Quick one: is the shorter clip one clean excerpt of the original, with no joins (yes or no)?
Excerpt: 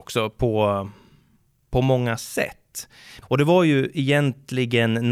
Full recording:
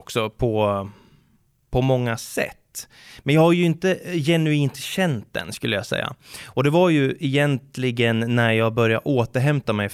no